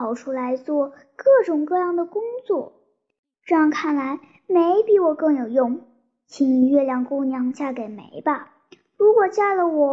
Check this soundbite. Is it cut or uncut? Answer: uncut